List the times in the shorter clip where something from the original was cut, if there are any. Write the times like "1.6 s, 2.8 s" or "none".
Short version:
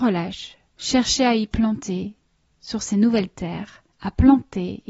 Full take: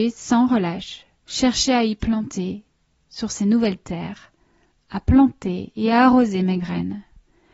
3.9 s